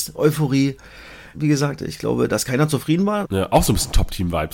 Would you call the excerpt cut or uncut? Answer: cut